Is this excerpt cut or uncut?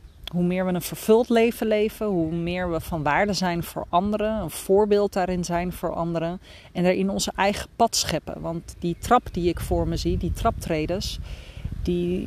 uncut